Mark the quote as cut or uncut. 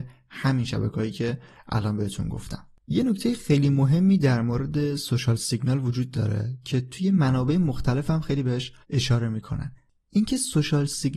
cut